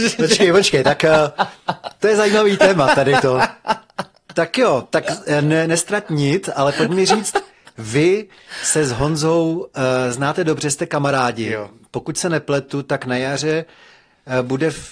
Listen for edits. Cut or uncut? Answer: uncut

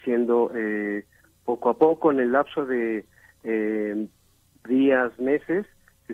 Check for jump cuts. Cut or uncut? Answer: uncut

